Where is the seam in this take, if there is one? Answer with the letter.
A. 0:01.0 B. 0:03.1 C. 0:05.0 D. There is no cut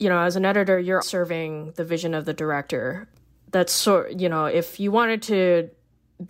A